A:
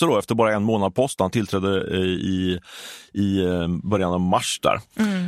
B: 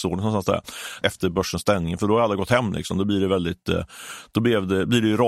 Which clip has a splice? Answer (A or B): B